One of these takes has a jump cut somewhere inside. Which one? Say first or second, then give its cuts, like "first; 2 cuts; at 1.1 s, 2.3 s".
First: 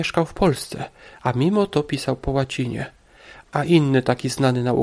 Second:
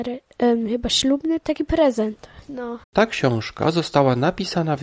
second; 1 cut; at 2.8 s